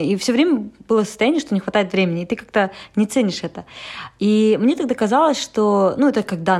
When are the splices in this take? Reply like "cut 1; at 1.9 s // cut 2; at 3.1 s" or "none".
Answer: none